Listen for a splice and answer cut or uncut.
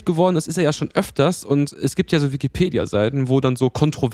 uncut